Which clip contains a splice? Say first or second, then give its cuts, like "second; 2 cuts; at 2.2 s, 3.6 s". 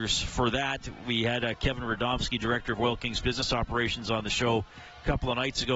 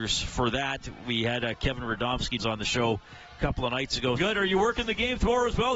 second; 2 cuts; at 2.4 s, 4.2 s